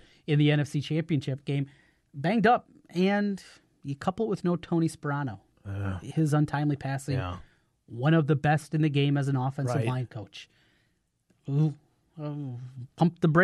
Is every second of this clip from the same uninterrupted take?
yes; 0 cuts

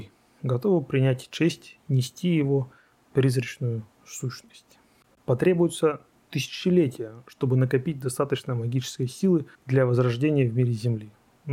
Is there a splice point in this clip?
yes; 2 cuts; at 5.1 s, 9.5 s

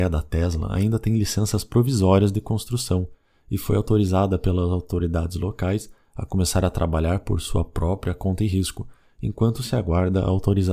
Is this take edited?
no; 0 cuts

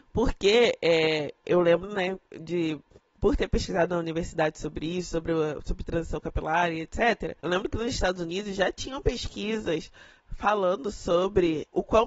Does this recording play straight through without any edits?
yes; 0 cuts

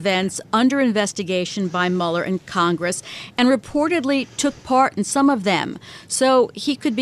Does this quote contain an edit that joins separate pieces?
no; 0 cuts

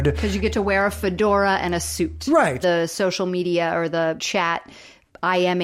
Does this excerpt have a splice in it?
yes; 2 cuts; at 2.6 s, 4.2 s

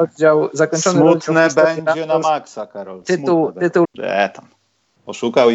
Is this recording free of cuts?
no; 1 cut; at 3.8 s

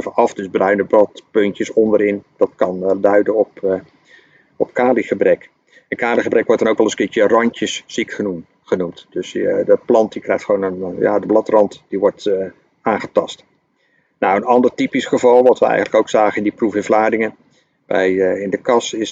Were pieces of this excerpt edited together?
no; 0 cuts

